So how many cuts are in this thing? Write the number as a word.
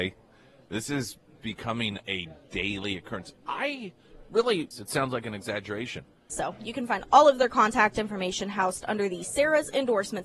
two